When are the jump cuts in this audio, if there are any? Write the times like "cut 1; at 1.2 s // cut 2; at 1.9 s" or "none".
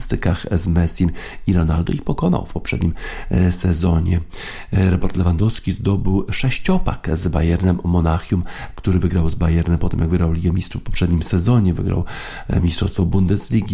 cut 1; at 8.7 s